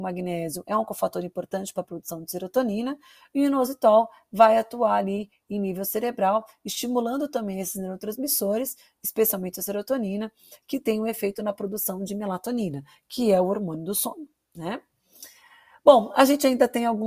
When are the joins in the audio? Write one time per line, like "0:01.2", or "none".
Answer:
none